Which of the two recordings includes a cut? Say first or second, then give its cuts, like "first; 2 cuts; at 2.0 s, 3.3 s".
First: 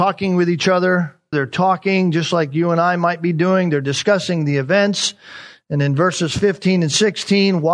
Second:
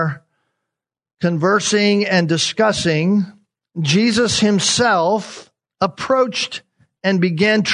first; 1 cut; at 1.3 s